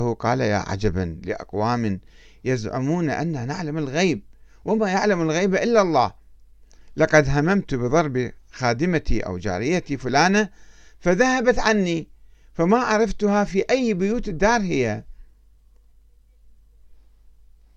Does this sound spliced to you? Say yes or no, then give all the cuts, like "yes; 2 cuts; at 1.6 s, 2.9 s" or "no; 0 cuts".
no; 0 cuts